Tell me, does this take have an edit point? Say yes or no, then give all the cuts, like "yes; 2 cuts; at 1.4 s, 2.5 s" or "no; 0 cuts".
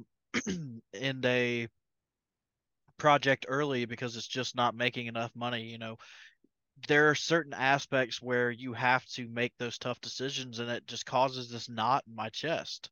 no; 0 cuts